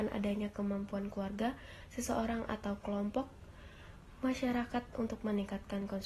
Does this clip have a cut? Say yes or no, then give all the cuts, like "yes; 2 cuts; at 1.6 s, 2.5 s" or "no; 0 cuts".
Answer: no; 0 cuts